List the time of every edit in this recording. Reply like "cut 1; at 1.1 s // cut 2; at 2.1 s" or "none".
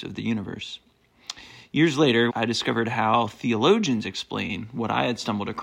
cut 1; at 2.3 s